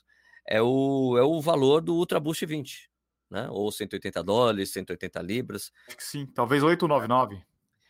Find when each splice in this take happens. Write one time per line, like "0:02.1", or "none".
0:05.9